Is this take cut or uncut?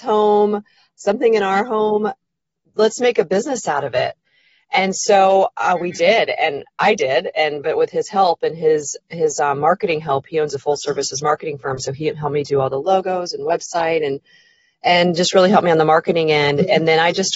uncut